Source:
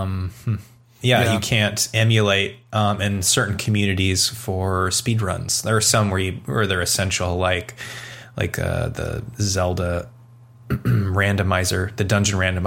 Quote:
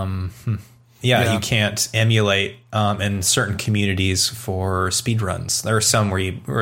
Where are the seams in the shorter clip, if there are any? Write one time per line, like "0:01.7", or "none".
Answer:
none